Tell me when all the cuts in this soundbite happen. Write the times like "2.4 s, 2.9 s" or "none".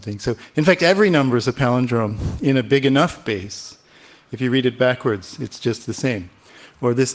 4.3 s